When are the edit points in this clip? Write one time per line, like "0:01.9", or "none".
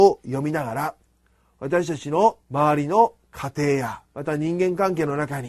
0:02.4
0:04.0